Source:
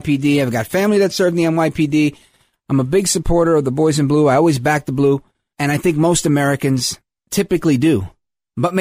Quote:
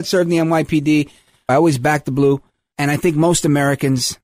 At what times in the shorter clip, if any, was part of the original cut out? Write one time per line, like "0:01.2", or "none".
0:01.5